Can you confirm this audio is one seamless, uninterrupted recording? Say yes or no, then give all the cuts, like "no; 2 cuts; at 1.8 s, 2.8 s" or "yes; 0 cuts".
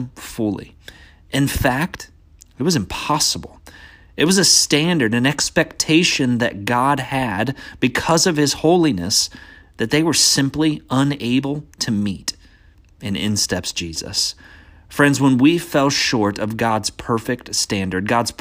yes; 0 cuts